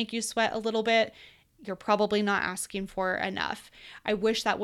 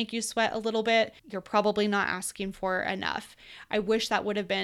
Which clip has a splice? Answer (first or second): second